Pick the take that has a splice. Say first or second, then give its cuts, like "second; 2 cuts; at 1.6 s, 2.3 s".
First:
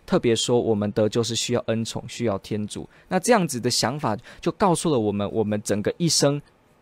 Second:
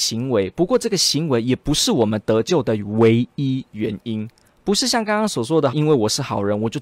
second; 1 cut; at 5.7 s